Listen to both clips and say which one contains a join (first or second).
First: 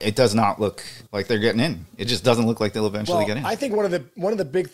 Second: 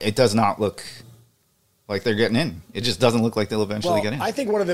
first